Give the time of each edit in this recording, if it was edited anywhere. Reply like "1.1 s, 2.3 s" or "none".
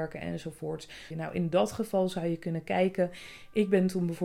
1.1 s